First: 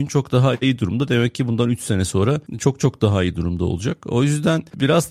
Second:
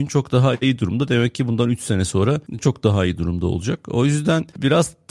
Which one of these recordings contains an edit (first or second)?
second